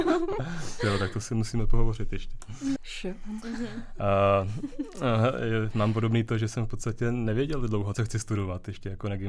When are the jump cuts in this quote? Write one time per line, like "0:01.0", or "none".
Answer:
0:02.8
0:07.9